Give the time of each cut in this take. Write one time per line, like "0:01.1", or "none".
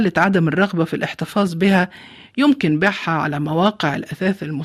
none